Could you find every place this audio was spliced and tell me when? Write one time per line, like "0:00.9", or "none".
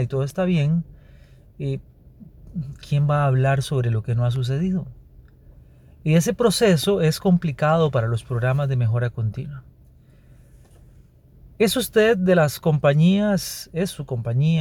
none